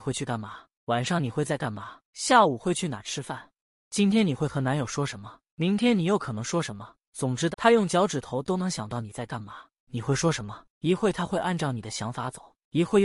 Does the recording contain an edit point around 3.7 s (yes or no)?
no